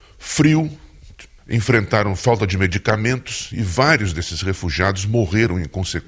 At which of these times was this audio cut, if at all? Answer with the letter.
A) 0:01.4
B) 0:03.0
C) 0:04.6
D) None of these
A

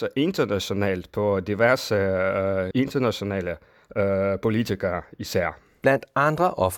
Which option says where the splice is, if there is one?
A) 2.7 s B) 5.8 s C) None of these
A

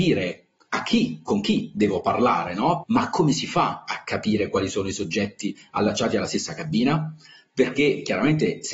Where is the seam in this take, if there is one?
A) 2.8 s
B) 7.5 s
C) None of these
A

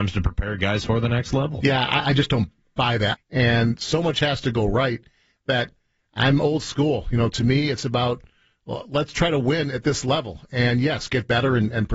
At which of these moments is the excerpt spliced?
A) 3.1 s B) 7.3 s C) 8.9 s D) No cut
A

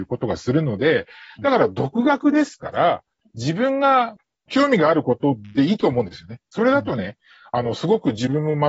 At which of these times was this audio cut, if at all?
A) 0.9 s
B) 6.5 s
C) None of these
B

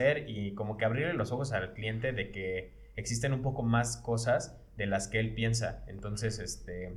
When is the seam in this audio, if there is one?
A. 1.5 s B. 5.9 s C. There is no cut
C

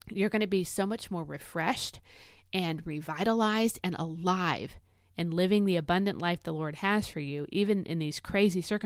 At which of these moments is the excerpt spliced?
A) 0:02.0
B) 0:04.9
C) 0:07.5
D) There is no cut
D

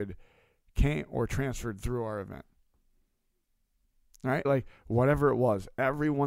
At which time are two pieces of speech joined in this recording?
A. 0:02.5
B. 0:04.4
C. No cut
B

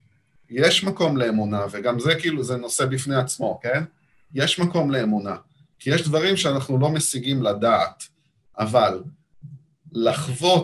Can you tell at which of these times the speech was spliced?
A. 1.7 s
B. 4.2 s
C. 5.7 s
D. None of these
D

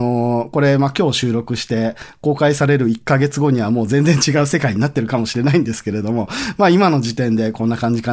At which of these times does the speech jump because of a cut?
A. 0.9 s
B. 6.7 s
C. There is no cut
C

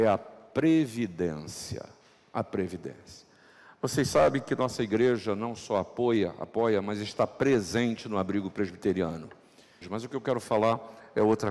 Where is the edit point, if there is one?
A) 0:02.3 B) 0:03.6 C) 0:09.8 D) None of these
C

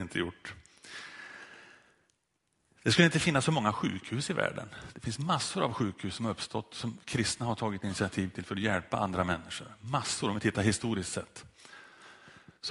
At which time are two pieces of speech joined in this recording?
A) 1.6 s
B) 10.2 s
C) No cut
C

